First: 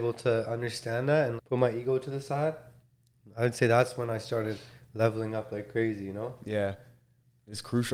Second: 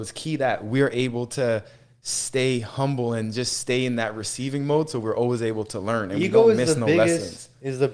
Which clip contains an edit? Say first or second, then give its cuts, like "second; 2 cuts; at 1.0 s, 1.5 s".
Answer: first; 1 cut; at 1.4 s